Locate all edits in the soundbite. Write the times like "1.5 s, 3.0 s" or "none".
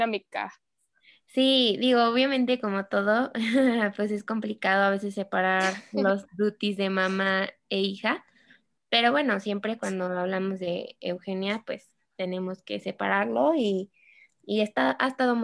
none